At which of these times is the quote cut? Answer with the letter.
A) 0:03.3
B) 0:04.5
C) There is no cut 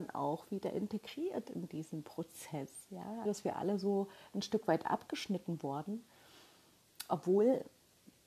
A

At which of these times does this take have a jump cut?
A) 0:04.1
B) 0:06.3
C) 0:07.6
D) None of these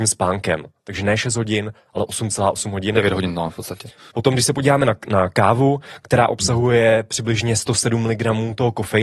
A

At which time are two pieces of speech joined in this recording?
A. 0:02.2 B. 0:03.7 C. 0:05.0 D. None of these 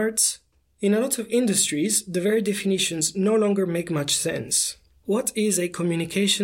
C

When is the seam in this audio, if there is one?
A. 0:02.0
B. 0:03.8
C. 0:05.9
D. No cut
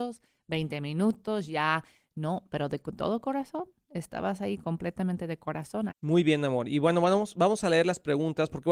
C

